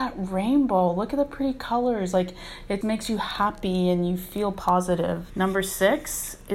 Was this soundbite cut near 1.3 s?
no; 2 cuts; at 2.8 s, 5.3 s

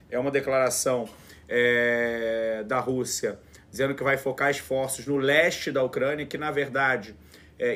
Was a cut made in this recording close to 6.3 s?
no; 0 cuts

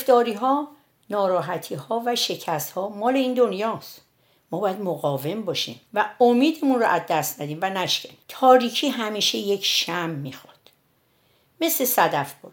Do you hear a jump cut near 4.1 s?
no; 2 cuts; at 5.9 s, 8.2 s

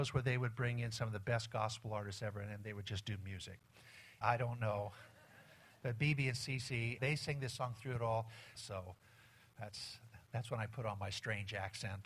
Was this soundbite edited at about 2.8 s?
no; 3 cuts; at 4.2 s, 7.0 s, 8.5 s

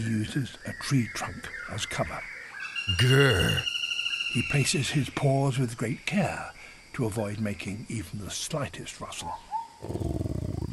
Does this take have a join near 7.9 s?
no; 0 cuts

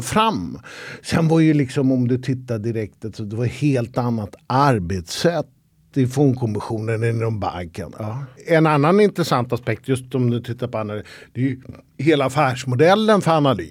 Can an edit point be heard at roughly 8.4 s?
no; 0 cuts

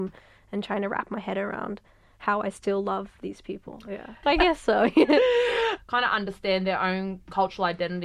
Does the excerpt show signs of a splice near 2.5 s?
no; 2 cuts; at 4.2 s, 5.8 s

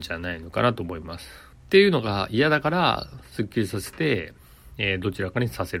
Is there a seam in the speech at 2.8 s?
no; 1 cut; at 1.5 s

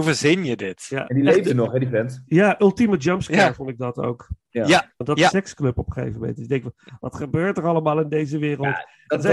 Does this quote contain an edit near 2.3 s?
no; 1 cut; at 5.3 s

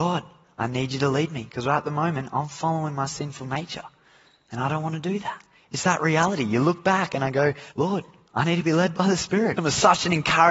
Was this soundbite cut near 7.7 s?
yes; 2 cuts; at 7.7 s, 9.6 s

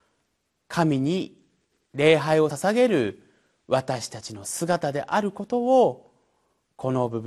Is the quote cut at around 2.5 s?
yes; 1 cut; at 2.5 s

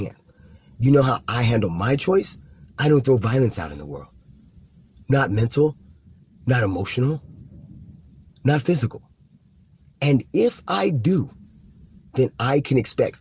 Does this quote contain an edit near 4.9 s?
no; 0 cuts

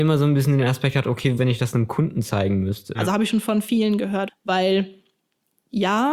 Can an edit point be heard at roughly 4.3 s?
yes; 3 cuts; at 1.4 s, 2.9 s, 4.3 s

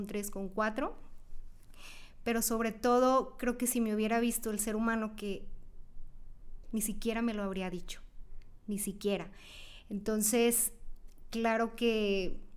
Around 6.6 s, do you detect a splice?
yes; 1 cut; at 6.6 s

